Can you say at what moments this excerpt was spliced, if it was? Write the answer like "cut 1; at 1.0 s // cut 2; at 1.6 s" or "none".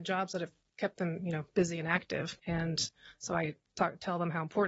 cut 1; at 2.4 s